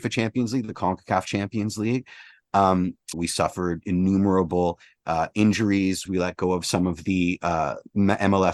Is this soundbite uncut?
no; 2 cuts; at 3.1 s, 6.1 s

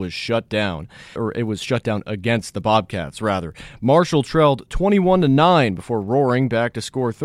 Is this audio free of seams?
no; 1 cut; at 1.2 s

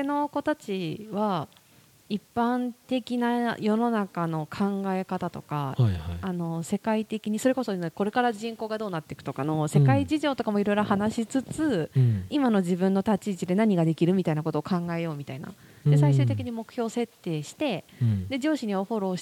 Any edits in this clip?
no; 0 cuts

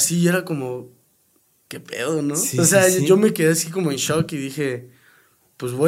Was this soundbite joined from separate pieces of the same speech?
no; 0 cuts

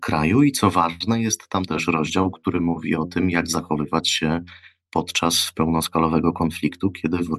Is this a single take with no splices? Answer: yes; 0 cuts

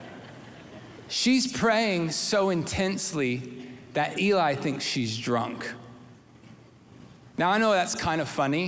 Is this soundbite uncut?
yes; 0 cuts

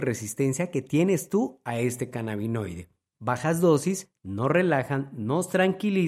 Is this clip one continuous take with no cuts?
no; 1 cut; at 3.1 s

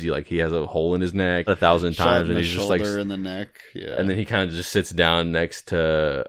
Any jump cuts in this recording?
yes; 1 cut; at 1.5 s

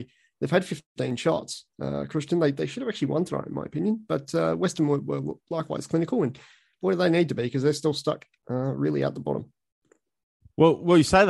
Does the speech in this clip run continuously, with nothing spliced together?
yes; 0 cuts

